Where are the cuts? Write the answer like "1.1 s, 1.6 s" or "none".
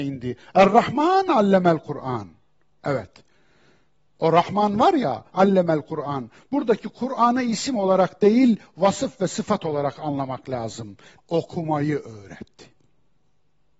5.3 s, 11.2 s